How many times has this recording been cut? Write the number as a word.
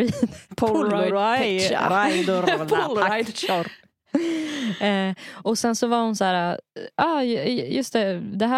zero